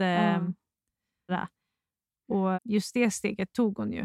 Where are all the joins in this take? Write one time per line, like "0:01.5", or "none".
0:01.3
0:02.5